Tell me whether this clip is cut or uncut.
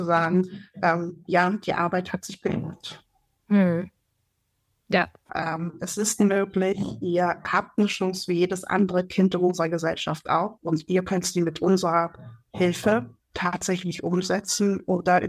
cut